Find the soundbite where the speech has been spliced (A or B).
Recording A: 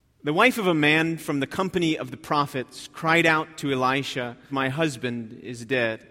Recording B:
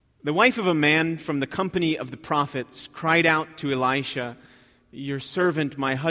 A